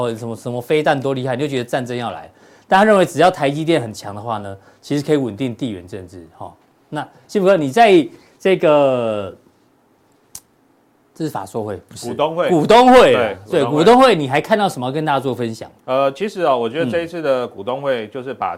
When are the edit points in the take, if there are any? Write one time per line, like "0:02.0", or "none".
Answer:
0:15.8